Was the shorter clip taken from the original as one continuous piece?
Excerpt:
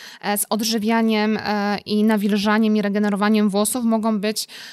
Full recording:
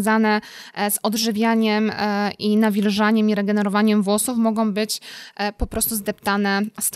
yes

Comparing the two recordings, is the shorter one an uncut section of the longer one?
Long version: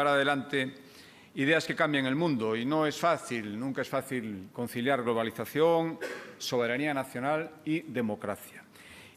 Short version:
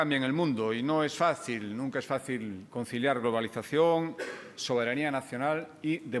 yes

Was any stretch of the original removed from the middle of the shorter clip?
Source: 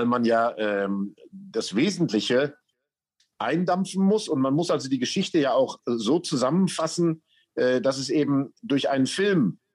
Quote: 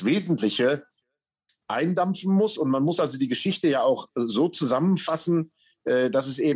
no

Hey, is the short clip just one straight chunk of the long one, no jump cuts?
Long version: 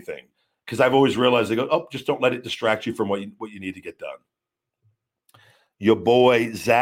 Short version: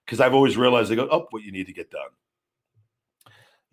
no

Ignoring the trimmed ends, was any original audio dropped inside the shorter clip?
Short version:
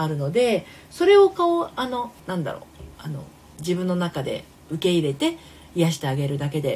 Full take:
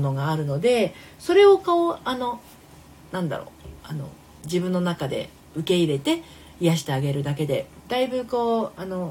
yes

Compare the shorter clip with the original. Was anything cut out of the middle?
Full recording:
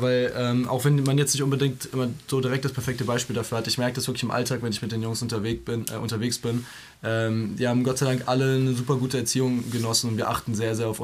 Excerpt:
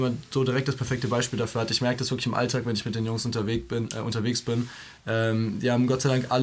no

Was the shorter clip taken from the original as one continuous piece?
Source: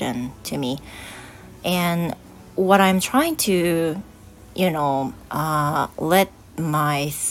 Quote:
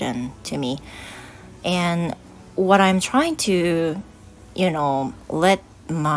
no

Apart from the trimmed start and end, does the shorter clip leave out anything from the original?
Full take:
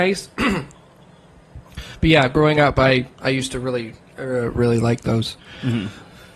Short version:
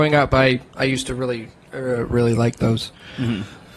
no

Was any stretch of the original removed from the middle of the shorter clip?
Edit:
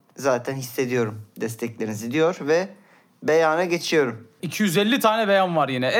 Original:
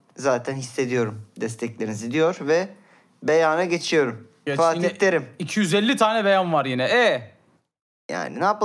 yes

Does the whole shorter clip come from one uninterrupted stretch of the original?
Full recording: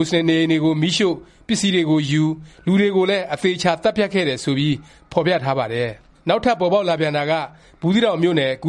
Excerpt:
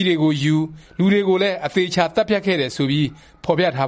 yes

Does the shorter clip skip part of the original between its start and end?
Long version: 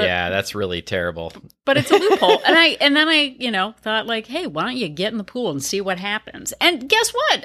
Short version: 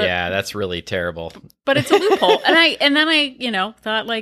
no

